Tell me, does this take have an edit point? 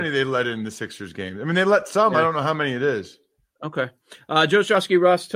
no; 0 cuts

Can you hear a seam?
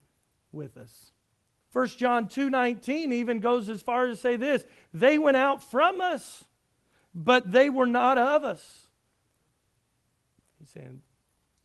yes; 2 cuts; at 1.6 s, 10.4 s

